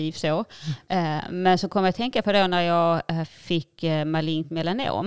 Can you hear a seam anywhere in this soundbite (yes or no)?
no